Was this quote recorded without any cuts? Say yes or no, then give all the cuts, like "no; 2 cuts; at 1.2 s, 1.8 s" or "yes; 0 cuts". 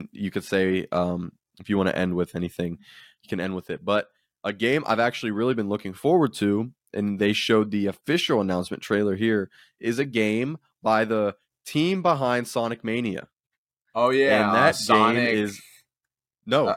yes; 0 cuts